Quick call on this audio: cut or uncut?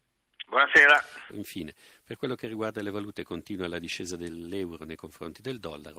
cut